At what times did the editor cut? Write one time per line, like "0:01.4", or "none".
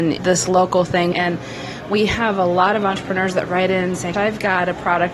0:01.1
0:04.1